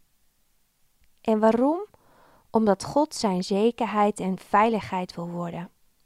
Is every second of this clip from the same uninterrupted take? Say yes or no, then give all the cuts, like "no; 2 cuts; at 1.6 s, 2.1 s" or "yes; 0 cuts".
yes; 0 cuts